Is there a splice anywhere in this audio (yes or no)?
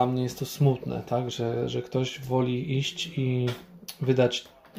no